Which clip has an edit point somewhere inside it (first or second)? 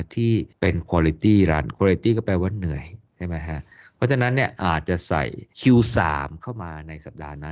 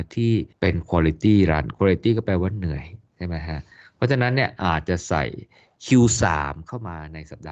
first